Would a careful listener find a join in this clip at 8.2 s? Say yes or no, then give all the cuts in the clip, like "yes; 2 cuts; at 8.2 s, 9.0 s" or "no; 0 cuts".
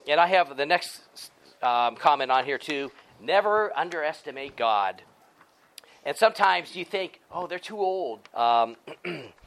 yes; 2 cuts; at 5.9 s, 8.2 s